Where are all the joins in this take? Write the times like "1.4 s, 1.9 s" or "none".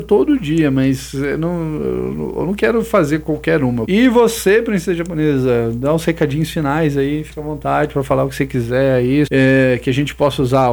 3.8 s, 9.3 s